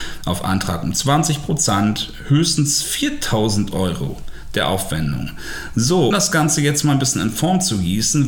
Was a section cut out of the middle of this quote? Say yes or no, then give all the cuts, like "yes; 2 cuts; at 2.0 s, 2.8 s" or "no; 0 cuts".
yes; 1 cut; at 6.1 s